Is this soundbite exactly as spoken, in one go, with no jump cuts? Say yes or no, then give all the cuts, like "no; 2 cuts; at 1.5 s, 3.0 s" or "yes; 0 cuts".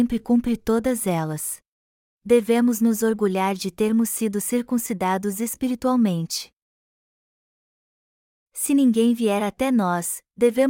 no; 1 cut; at 2.1 s